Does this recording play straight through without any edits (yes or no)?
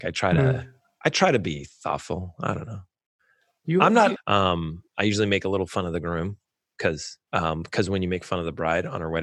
no